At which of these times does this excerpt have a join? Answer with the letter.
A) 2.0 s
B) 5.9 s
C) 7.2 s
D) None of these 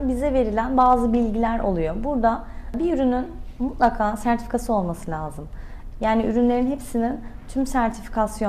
B